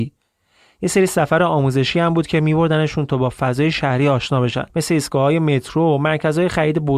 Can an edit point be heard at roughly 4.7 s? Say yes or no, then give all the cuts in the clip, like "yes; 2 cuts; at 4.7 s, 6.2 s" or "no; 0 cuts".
yes; 1 cut; at 4.7 s